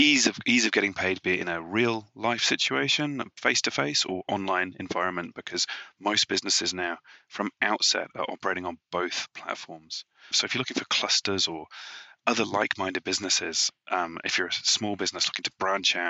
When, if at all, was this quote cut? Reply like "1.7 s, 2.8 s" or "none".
10.3 s

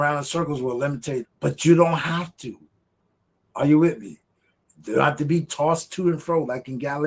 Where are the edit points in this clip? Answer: 1.2 s

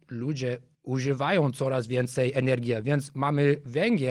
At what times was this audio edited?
none

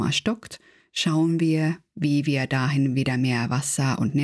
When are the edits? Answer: none

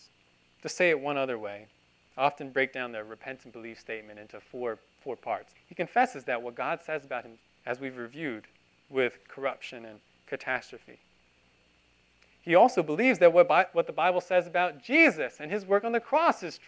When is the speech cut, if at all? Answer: 5.5 s, 7.5 s

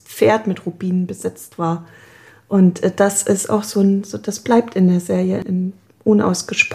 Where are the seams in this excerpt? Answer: none

